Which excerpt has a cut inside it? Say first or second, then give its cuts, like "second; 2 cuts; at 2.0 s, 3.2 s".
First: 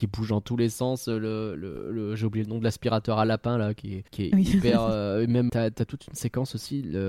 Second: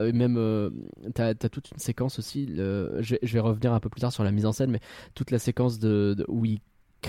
first; 2 cuts; at 4.1 s, 5.5 s